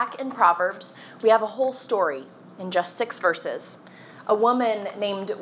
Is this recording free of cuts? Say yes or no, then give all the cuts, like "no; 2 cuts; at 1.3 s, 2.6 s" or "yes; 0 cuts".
yes; 0 cuts